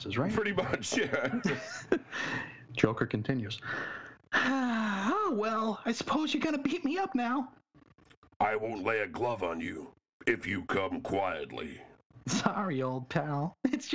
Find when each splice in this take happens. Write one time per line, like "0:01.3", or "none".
none